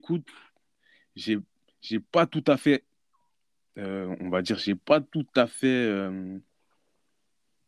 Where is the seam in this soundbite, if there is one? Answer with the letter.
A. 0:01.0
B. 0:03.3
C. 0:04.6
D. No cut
D